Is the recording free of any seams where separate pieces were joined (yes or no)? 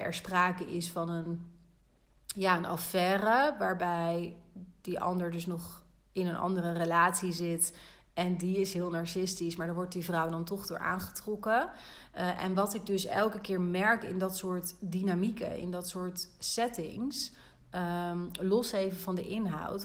yes